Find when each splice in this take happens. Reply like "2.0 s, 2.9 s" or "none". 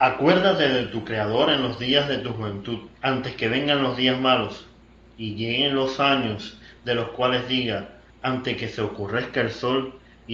2.9 s, 8.1 s